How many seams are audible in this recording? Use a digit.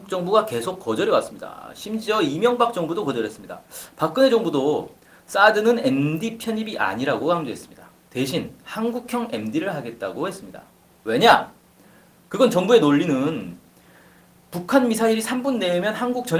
0